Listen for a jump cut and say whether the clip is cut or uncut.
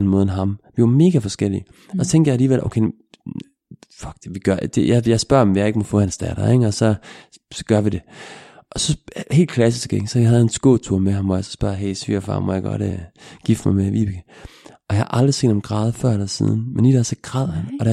uncut